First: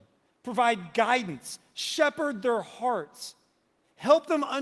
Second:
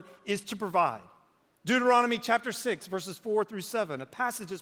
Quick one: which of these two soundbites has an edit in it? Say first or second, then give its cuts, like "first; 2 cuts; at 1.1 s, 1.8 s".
second; 1 cut; at 1.6 s